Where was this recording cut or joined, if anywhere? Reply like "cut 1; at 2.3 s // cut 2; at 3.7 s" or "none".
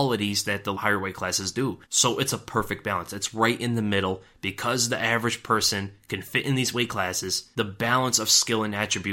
none